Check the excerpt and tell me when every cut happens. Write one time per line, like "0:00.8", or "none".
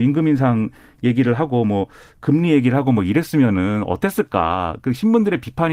none